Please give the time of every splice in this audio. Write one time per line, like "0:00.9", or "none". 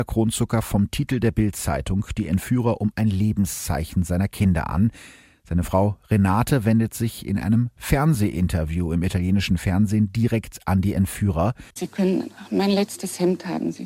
0:11.7